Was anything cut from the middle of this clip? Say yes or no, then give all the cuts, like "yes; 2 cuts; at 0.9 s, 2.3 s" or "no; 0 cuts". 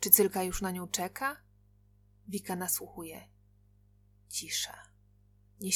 no; 0 cuts